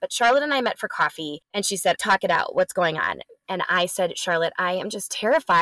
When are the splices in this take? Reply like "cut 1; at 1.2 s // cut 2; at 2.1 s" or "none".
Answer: cut 1; at 2.0 s